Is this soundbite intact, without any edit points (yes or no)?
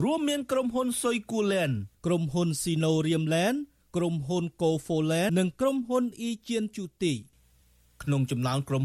no